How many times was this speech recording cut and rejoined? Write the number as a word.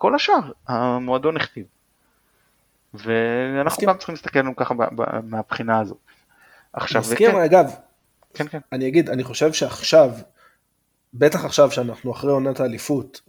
one